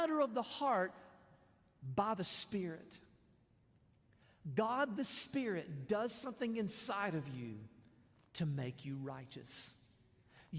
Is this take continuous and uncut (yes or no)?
yes